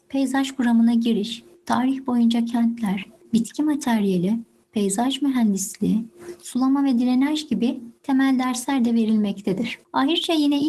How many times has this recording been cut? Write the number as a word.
one